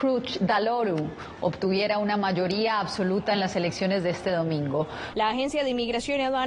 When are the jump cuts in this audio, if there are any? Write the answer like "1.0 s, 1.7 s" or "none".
5.1 s